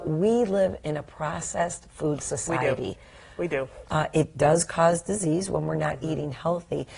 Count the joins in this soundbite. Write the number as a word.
one